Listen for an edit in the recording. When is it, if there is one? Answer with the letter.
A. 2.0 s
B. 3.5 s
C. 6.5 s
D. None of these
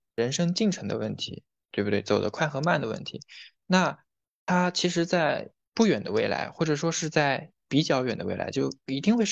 D